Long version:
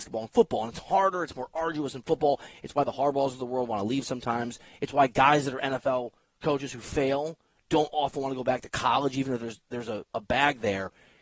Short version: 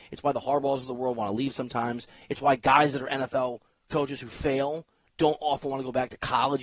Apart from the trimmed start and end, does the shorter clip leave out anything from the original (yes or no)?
no